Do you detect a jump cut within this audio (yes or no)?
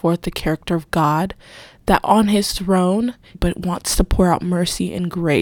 yes